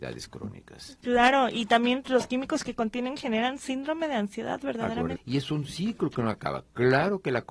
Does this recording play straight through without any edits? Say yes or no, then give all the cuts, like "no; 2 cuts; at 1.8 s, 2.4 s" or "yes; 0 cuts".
no; 2 cuts; at 2.0 s, 5.1 s